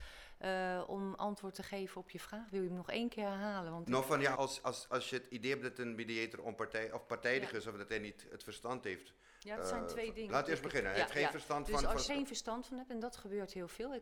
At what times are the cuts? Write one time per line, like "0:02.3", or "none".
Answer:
0:04.3
0:10.3
0:12.1

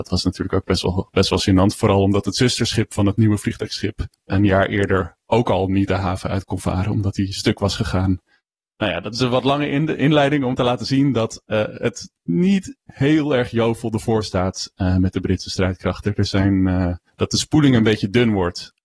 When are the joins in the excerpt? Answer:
0:17.1

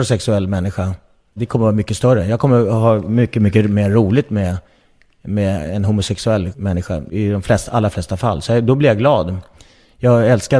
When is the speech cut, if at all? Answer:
none

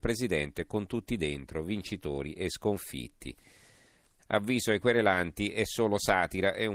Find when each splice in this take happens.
0:04.2

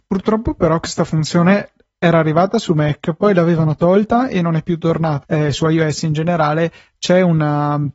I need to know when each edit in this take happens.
0:05.2

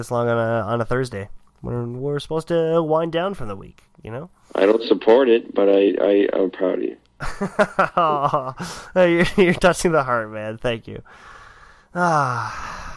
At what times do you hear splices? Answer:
none

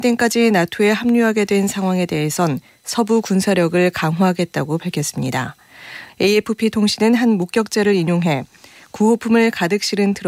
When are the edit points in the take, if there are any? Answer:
0:06.1

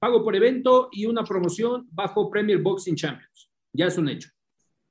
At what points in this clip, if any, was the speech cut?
none

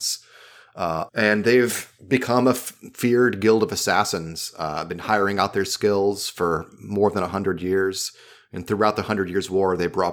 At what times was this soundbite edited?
0:01.1

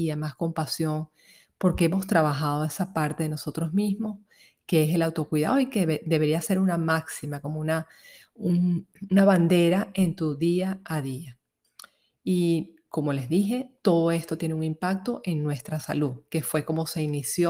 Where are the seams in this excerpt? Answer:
none

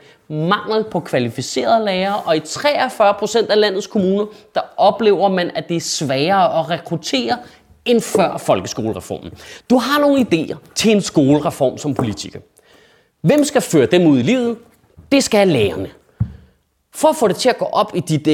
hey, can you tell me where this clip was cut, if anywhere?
0:09.6

